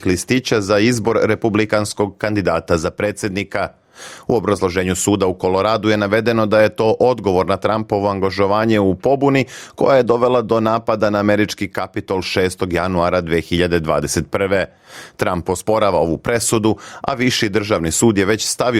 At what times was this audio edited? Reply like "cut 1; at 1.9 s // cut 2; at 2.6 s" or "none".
none